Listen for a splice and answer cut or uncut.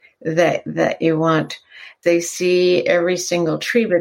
cut